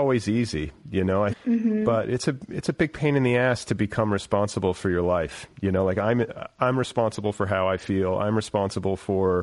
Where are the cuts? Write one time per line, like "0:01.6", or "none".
0:01.3